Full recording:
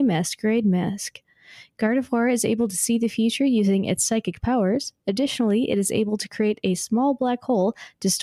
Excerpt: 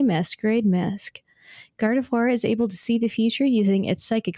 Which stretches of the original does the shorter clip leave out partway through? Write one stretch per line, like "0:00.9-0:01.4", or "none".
none